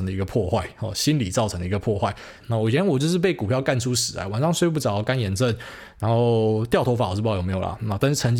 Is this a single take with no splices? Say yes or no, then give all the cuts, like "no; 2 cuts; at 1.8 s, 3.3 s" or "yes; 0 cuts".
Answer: no; 1 cut; at 2.4 s